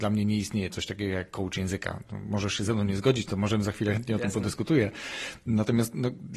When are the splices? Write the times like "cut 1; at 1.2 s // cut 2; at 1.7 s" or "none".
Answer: none